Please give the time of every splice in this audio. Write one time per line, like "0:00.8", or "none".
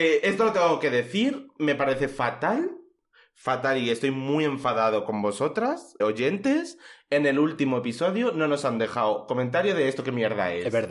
0:06.0